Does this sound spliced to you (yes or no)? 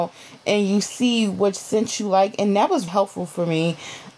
yes